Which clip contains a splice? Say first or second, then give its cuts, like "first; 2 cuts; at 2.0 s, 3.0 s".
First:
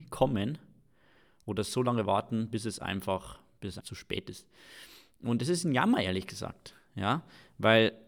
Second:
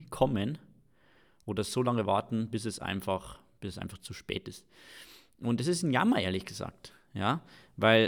first; 1 cut; at 3.8 s